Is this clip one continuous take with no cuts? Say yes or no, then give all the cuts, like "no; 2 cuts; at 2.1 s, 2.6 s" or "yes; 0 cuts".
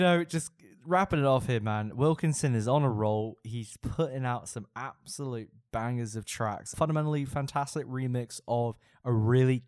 no; 1 cut; at 6.7 s